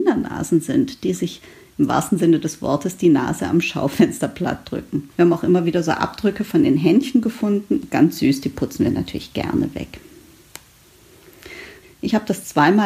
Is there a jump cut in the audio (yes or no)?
yes